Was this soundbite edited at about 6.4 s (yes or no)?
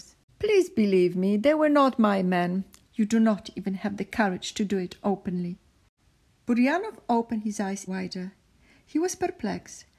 no